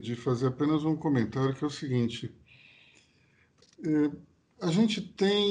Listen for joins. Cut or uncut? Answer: uncut